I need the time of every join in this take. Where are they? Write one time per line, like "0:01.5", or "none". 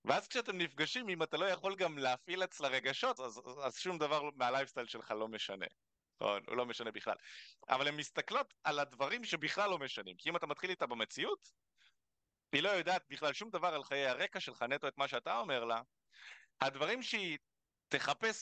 0:03.2

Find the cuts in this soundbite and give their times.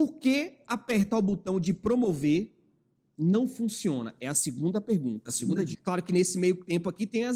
0:05.7

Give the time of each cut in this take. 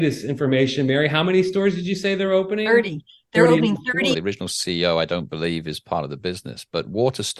0:04.1

